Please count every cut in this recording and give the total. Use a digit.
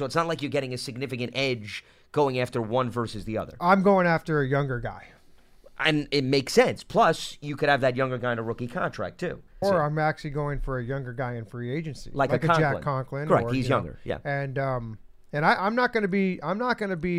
1